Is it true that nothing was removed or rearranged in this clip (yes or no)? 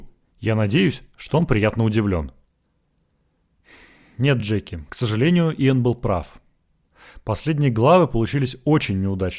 yes